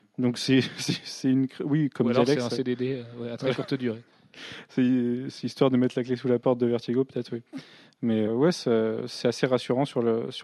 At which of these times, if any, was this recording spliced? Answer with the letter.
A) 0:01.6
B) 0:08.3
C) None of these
B